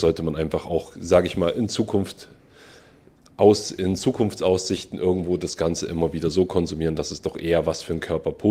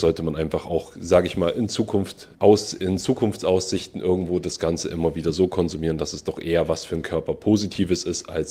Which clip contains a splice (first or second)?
second